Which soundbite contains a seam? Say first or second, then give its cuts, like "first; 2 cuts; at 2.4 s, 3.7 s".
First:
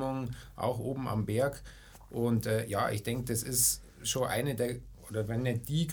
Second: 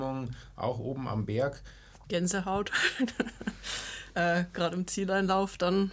second; 1 cut; at 2.0 s